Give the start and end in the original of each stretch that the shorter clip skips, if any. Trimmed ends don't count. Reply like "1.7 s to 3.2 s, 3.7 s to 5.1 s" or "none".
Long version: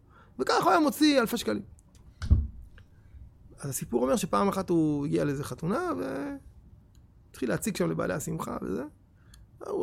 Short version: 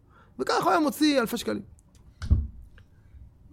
none